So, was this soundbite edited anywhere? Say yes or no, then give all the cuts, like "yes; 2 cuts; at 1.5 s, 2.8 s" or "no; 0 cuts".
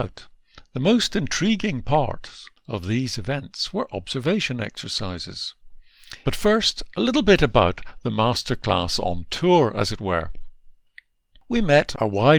yes; 2 cuts; at 2.6 s, 6.2 s